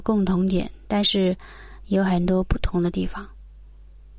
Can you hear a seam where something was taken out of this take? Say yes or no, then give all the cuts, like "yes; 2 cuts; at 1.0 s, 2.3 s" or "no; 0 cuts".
no; 0 cuts